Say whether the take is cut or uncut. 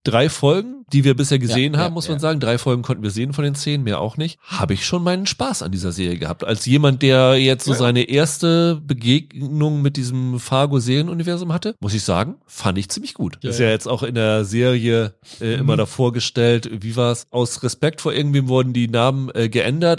cut